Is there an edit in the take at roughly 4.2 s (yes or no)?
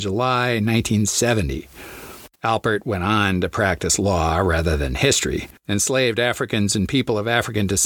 no